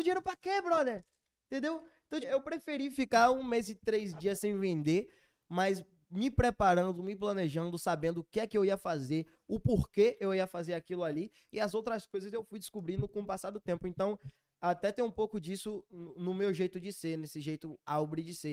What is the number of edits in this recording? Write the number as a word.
one